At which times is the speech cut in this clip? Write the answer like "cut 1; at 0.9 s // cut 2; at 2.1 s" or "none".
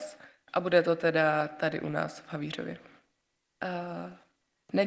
cut 1; at 3.4 s